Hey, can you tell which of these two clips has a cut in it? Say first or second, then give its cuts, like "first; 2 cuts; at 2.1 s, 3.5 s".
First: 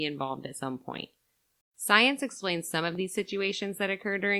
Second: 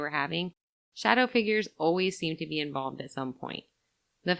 first; 1 cut; at 1.6 s